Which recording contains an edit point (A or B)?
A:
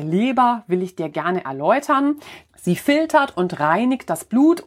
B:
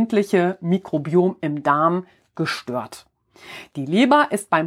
A